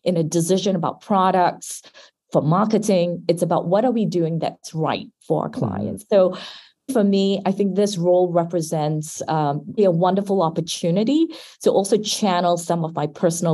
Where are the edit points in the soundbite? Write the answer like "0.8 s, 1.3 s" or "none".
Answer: 6.9 s, 9.8 s